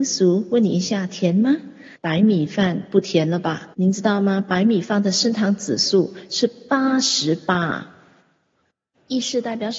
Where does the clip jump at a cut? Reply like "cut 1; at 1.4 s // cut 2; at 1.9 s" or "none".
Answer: cut 1; at 2.0 s // cut 2; at 3.7 s